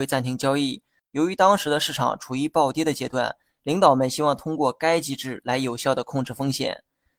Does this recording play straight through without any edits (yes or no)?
no